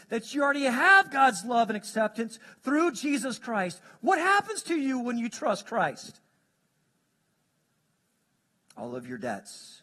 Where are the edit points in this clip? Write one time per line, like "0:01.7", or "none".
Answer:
none